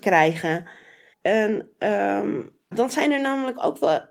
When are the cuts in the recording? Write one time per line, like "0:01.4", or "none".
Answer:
0:01.1
0:02.7